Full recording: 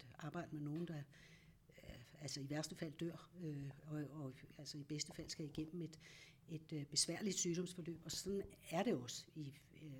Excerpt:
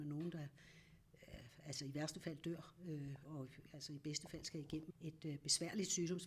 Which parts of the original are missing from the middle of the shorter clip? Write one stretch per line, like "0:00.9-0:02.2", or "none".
0:03.8-0:04.1
0:05.7-0:06.4

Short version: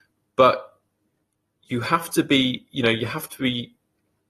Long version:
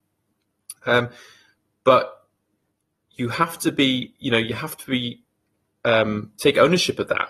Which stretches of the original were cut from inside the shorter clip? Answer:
none

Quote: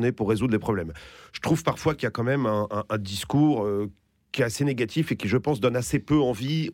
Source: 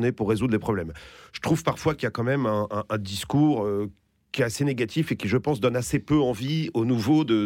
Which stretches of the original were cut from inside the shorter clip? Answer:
none

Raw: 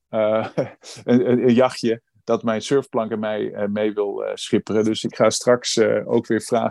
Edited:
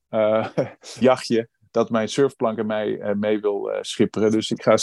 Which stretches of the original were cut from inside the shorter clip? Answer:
0:01.0-0:01.5

